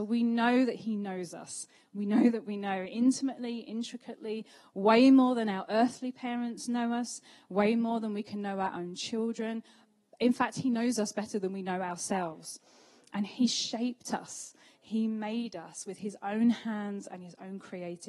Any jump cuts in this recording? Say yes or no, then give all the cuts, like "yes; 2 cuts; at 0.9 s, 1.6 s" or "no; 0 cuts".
no; 0 cuts